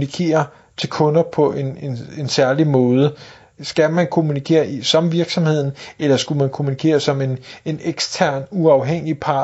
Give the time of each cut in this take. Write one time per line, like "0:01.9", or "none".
0:03.6